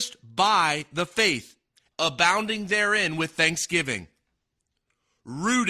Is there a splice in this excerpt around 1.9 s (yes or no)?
yes